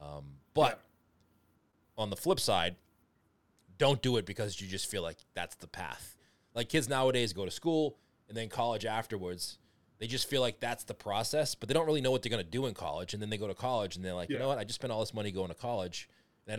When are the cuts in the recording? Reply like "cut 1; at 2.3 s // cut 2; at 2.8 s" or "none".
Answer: cut 1; at 6.2 s